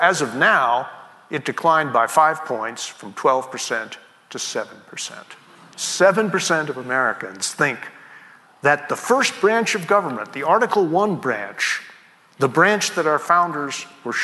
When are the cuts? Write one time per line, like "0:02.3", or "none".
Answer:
none